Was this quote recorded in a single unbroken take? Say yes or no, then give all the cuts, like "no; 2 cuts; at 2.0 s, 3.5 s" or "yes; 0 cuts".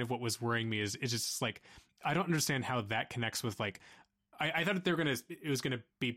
yes; 0 cuts